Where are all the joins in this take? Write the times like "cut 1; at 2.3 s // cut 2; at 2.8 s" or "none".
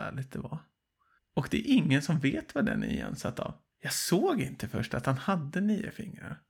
cut 1; at 1.2 s // cut 2; at 3.7 s